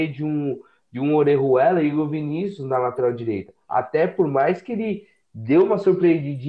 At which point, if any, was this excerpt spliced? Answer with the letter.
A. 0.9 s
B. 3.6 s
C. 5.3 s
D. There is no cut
D